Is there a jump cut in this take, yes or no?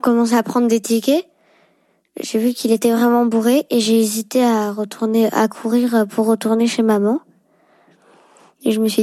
no